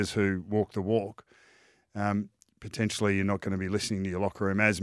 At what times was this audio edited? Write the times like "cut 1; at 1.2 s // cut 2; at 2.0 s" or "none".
none